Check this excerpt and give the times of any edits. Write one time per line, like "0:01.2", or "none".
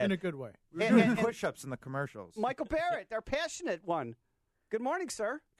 none